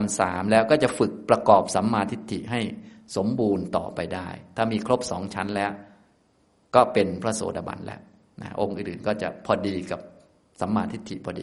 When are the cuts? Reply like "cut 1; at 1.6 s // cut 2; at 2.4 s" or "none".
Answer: none